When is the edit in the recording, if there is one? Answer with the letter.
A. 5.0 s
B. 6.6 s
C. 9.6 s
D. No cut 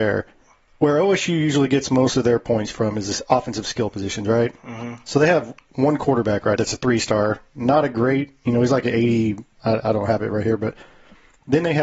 B